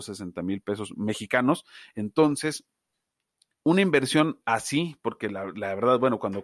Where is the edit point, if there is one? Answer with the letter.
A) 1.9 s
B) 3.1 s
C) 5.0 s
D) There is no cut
A